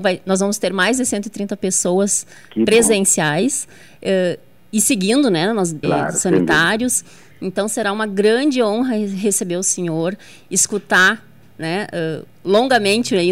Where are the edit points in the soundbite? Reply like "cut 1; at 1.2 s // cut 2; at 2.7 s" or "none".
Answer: cut 1; at 5.8 s